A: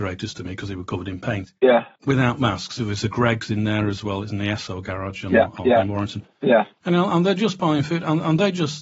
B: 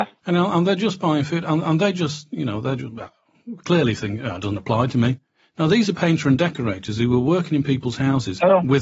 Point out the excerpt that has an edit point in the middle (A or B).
A